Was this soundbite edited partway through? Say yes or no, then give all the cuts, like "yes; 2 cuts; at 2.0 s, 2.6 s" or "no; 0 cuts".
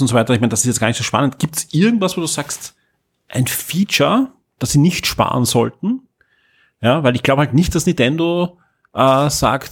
no; 0 cuts